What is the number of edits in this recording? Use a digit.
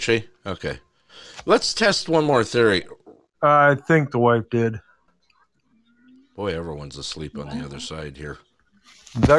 1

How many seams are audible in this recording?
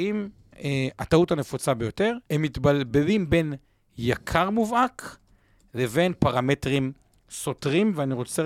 1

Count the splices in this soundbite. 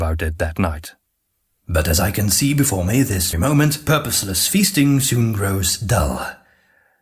1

